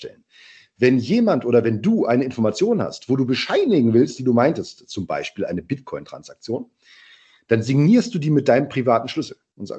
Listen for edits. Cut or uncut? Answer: cut